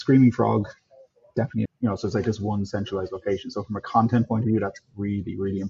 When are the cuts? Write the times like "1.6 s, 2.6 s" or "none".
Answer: 1.7 s

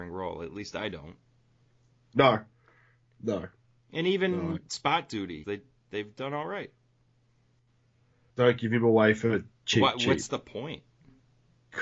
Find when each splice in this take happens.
5.4 s, 8.3 s

